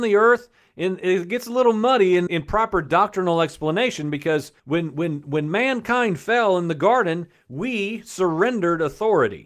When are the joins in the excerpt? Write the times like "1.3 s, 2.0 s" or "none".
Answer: 2.3 s, 4.6 s